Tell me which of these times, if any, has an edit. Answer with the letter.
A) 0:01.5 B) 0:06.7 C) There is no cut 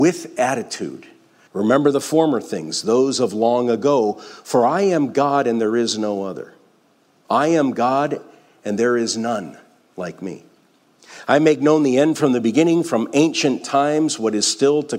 A